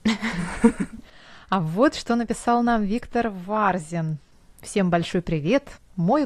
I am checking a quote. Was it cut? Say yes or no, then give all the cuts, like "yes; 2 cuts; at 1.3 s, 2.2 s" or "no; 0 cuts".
no; 0 cuts